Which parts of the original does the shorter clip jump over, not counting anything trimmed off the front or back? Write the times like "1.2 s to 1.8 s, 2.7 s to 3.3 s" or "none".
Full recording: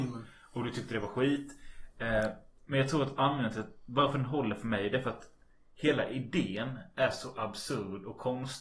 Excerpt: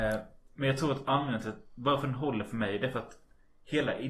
none